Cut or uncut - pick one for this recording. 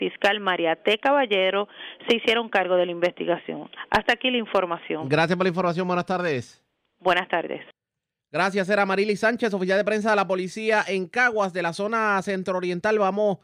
uncut